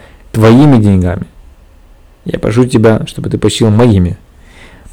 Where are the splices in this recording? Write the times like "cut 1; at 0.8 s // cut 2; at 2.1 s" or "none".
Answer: none